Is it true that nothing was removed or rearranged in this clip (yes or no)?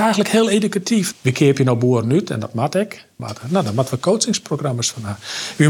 no